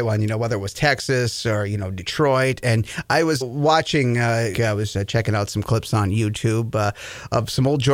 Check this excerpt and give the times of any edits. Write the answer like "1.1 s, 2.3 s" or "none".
3.4 s, 4.5 s